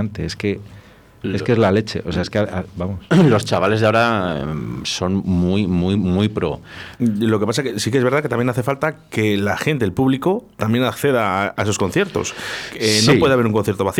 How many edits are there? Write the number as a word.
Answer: one